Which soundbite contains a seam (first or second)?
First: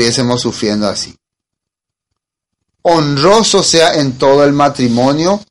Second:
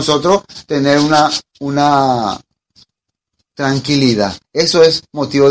second